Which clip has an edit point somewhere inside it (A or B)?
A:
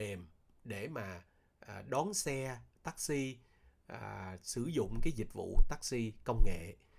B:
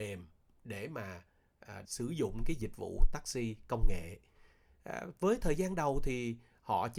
B